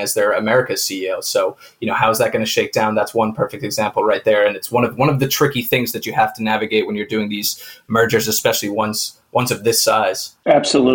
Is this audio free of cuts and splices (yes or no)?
yes